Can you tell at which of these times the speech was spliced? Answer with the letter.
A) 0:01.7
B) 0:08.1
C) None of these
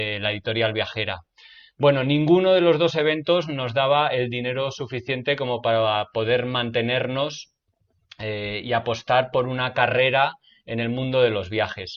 C